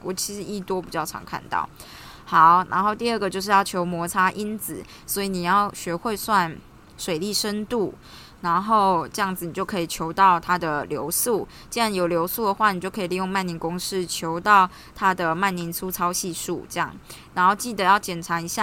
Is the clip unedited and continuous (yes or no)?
no